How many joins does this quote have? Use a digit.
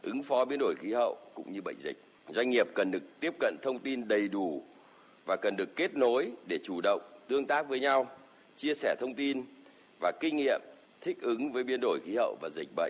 0